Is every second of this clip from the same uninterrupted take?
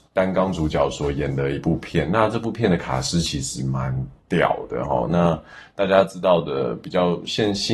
yes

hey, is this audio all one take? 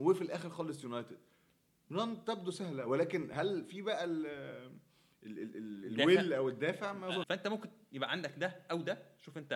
no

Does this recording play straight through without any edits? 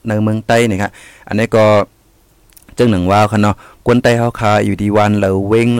yes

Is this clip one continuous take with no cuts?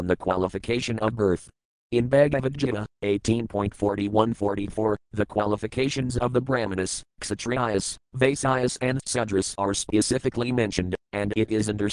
no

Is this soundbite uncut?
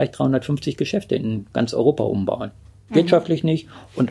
no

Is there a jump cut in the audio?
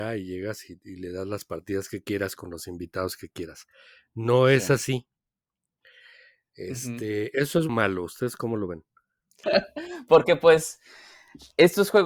yes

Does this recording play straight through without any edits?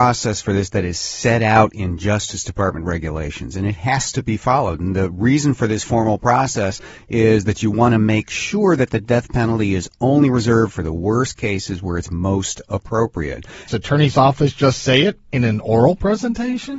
no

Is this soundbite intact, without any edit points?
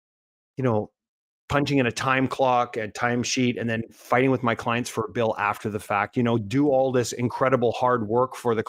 yes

